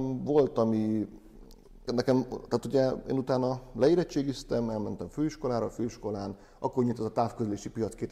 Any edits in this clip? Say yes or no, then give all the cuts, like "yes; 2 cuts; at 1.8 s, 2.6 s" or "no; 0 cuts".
yes; 1 cut; at 1.9 s